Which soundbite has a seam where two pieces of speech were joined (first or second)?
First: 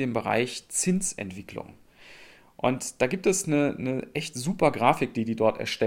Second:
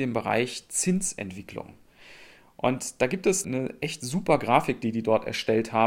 second